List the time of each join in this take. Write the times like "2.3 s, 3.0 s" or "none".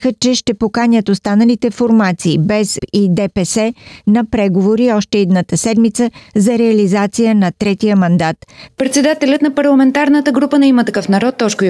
2.8 s, 8.7 s